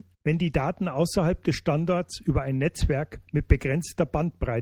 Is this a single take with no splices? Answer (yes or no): yes